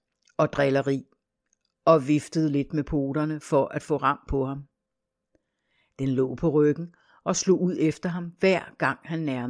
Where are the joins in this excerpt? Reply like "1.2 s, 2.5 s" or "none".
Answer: none